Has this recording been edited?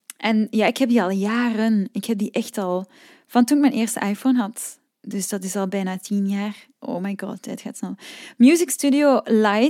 no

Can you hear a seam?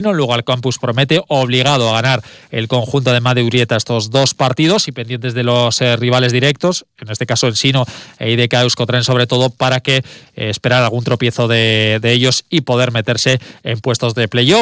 no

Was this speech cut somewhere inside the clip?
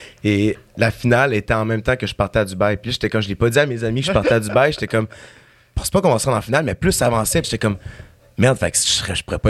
yes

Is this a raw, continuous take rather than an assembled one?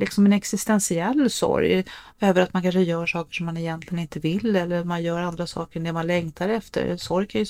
yes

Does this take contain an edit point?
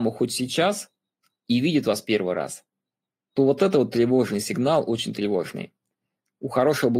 no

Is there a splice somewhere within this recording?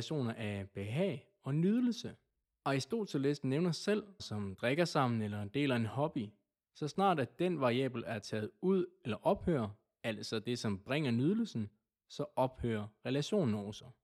yes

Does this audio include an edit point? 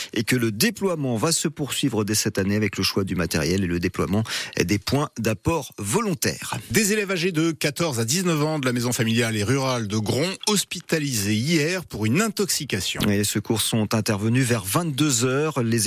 no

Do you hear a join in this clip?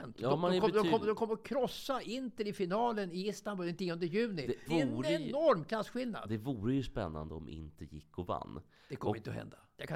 yes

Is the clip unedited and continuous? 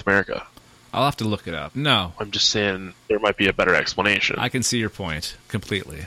no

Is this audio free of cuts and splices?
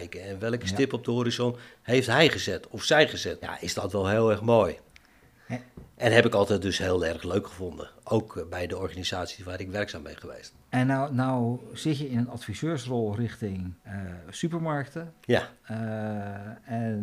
no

